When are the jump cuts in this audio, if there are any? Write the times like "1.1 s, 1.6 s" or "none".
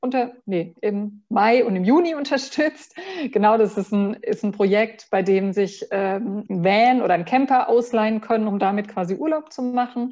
6.5 s